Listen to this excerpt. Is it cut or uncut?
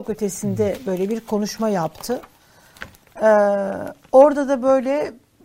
uncut